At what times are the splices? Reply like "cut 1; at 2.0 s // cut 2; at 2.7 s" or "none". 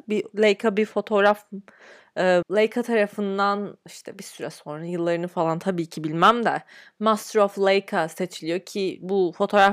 cut 1; at 2.4 s